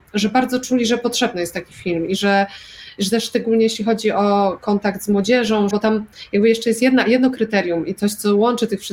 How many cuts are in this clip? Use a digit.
1